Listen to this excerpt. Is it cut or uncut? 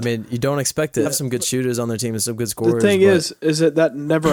cut